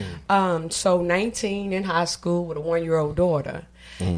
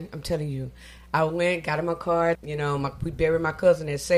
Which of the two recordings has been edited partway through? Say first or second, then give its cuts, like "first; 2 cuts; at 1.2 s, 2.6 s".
second; 1 cut; at 2.4 s